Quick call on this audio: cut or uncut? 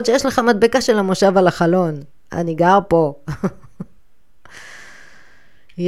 uncut